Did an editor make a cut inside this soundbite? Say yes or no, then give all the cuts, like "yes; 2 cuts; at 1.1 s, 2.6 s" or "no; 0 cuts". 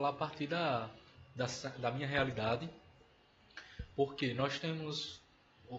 no; 0 cuts